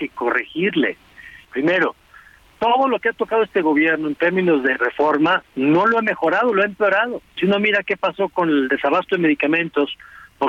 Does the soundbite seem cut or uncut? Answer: cut